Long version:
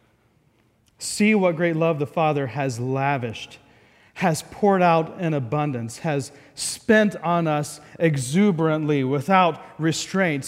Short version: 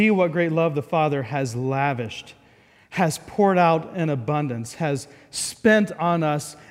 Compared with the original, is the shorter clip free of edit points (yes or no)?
yes